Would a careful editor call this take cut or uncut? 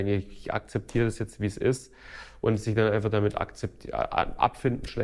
uncut